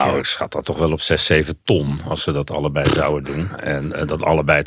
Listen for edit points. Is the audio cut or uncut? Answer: uncut